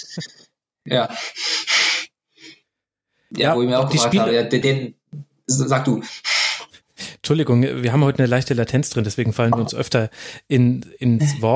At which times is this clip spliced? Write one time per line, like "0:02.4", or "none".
0:04.6